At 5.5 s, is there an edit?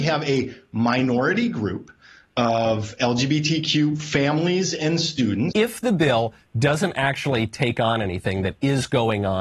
yes; 1 cut; at 5.5 s

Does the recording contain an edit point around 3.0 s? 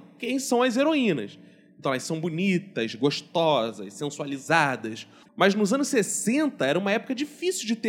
no; 1 cut; at 5.2 s

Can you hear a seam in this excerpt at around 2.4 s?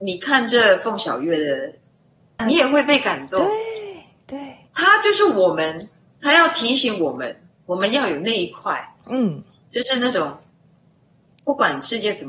yes; 1 cut; at 2.4 s

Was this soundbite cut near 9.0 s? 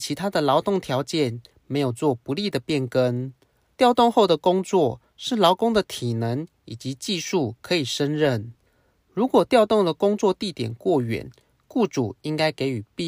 yes; 2 cuts; at 3.7 s, 9.0 s

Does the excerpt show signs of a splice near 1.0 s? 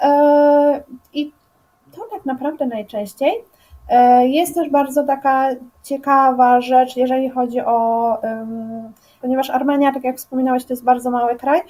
no; 1 cut; at 9.2 s

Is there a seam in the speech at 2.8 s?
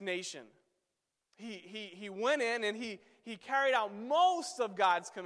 no; 1 cut; at 1.2 s

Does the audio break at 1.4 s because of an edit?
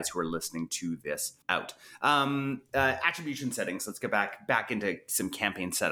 yes; 1 cut; at 1.4 s

